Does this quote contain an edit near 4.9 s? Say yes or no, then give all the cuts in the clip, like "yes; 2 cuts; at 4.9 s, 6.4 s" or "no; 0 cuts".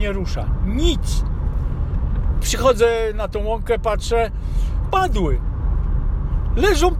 yes; 2 cuts; at 2.4 s, 4.9 s